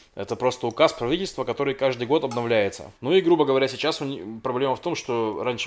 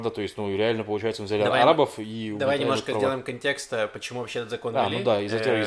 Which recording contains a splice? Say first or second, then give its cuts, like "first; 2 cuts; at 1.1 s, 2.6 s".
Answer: first; 1 cut; at 3.0 s